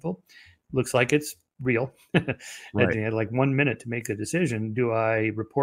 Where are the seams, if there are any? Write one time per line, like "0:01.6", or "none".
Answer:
0:02.9